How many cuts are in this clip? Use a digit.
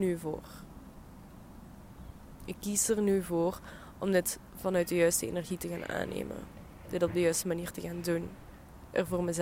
0